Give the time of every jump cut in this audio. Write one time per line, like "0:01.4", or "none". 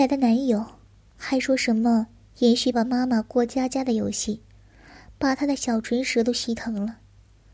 0:02.7